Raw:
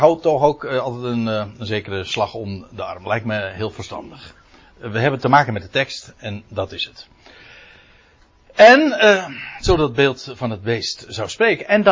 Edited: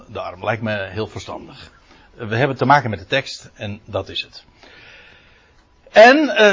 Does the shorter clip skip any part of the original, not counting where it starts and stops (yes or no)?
no